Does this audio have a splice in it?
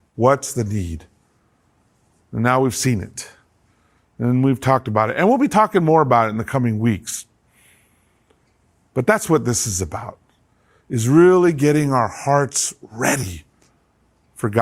no; 0 cuts

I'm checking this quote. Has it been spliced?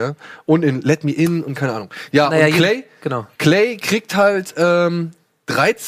no; 0 cuts

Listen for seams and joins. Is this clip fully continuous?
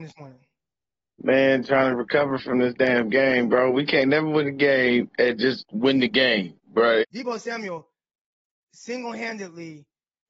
no; 1 cut; at 7.0 s

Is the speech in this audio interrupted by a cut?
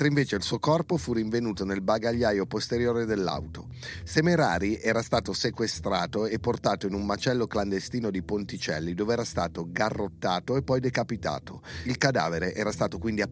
no; 0 cuts

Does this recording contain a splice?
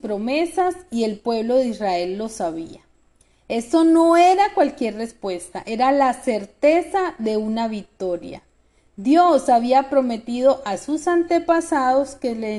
no; 0 cuts

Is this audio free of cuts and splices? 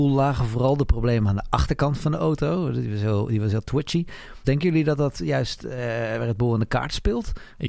no; 1 cut; at 4.4 s

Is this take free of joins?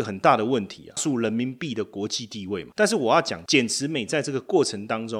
no; 1 cut; at 1.0 s

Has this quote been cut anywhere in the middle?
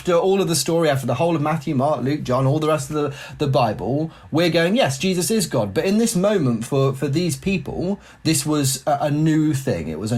no; 0 cuts

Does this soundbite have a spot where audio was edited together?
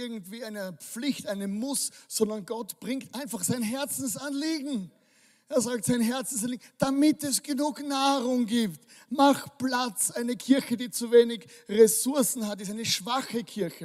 no; 0 cuts

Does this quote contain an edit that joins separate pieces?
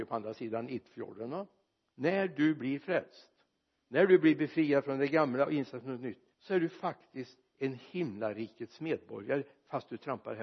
yes; 2 cuts; at 1.9 s, 6.3 s

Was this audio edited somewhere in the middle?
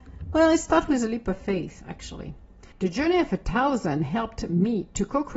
yes; 1 cut; at 2.7 s

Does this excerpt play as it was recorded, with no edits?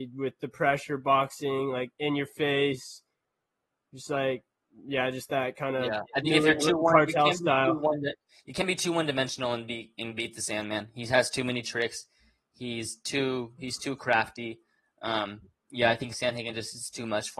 yes; 0 cuts

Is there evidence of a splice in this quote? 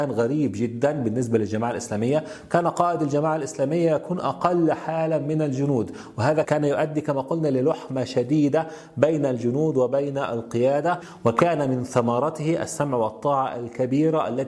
yes; 1 cut; at 6.4 s

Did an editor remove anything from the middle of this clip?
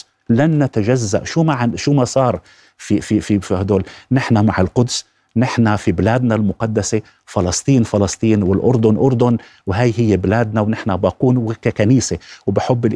no; 0 cuts

